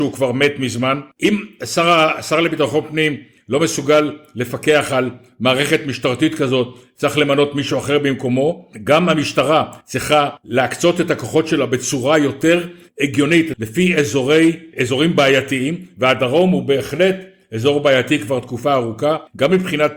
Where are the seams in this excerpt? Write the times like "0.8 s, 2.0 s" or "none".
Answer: 1.1 s, 13.5 s